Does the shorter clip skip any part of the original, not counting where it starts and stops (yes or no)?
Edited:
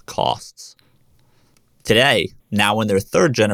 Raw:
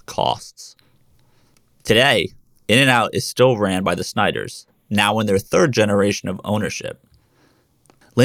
yes